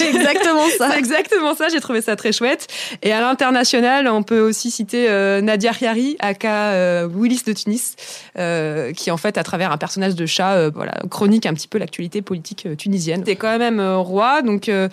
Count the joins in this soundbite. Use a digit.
2